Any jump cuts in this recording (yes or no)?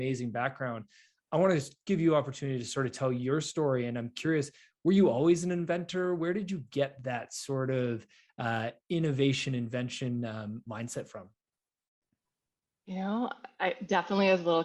no